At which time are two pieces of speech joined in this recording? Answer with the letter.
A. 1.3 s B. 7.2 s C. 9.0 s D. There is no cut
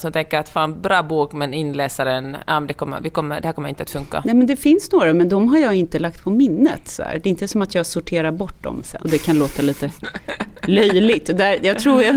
C